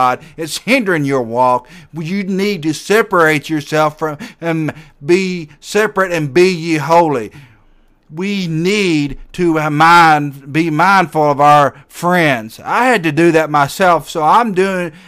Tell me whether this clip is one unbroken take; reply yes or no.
yes